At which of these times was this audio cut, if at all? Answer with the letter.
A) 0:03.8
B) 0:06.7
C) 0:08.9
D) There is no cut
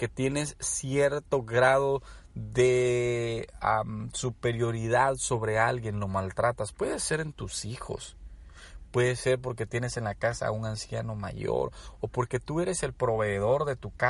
C